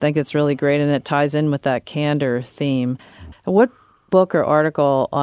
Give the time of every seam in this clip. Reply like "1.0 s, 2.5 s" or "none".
3.3 s